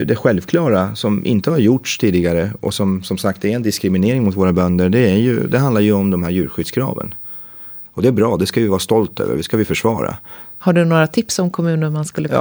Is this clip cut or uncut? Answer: cut